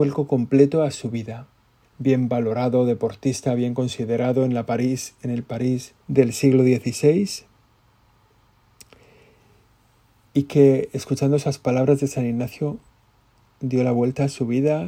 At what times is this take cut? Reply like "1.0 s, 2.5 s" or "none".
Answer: 1.8 s, 6.0 s